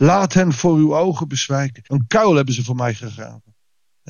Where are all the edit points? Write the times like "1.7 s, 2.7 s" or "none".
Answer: 1.9 s